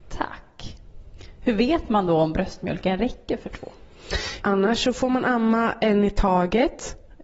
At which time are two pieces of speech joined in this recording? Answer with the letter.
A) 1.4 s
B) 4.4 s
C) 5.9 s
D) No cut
B